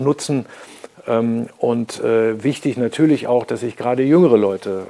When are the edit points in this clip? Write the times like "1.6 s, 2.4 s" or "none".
none